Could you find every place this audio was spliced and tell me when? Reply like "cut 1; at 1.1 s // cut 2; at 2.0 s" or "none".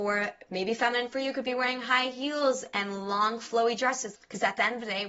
cut 1; at 4.1 s